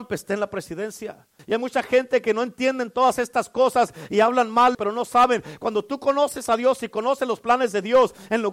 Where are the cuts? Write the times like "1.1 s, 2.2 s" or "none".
1.4 s, 4.7 s